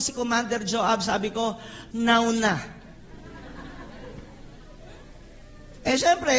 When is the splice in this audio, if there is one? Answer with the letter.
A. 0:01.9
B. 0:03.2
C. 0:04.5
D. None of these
A